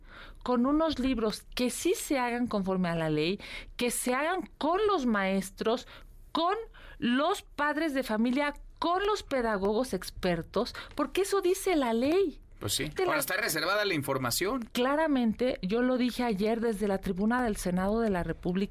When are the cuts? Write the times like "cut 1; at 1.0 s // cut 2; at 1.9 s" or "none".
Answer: cut 1; at 13.0 s // cut 2; at 14.7 s